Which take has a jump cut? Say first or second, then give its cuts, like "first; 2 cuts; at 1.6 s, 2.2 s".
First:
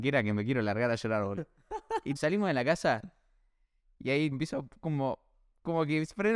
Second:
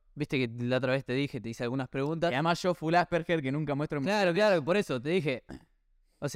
first; 2 cuts; at 2.2 s, 4.3 s